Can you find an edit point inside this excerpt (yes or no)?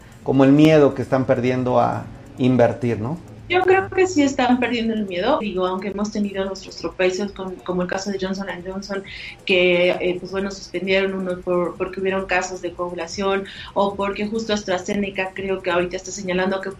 yes